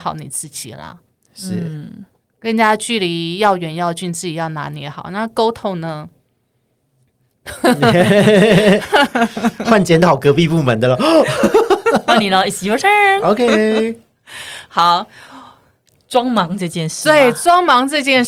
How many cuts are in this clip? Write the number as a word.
zero